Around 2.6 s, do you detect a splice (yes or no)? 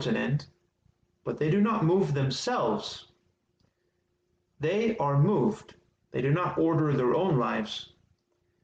no